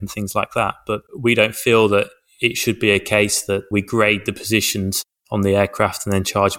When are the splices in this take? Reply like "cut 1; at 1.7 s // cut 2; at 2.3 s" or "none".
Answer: cut 1; at 1.1 s